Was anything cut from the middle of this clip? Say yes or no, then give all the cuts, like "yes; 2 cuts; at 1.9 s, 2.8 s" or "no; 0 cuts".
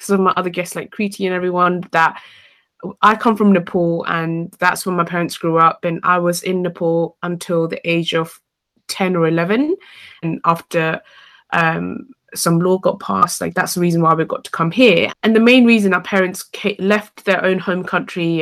yes; 2 cuts; at 10.2 s, 15.1 s